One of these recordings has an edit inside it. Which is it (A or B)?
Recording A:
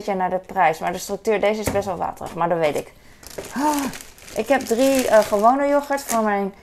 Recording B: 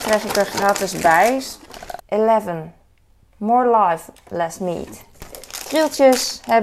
B